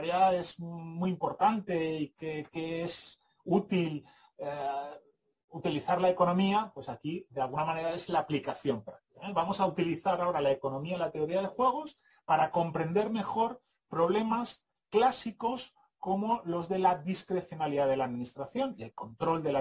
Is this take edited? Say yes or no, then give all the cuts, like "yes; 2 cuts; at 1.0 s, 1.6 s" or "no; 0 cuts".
no; 0 cuts